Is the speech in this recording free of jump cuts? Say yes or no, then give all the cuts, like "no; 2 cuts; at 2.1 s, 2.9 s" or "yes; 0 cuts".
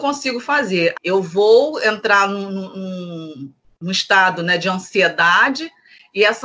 no; 1 cut; at 0.9 s